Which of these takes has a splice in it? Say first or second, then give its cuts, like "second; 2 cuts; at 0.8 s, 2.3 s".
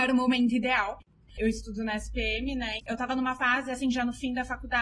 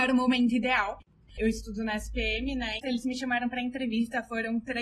second; 1 cut; at 2.8 s